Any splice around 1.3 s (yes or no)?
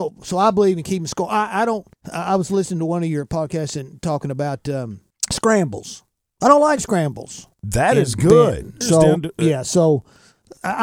no